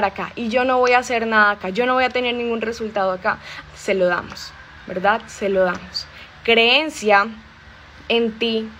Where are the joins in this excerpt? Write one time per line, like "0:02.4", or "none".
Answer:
0:03.6

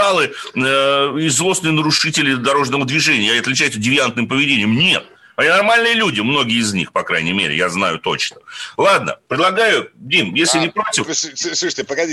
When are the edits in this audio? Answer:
none

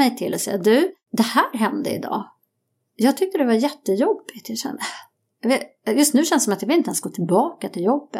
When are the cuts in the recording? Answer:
none

